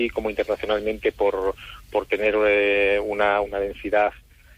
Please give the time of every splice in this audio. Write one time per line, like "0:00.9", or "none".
0:03.4